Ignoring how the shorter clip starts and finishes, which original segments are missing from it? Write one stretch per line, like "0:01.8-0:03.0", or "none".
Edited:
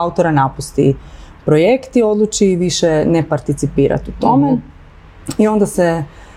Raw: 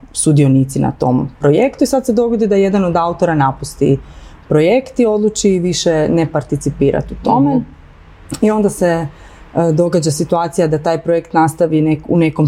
none